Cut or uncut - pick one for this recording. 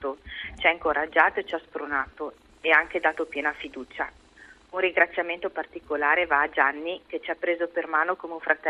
uncut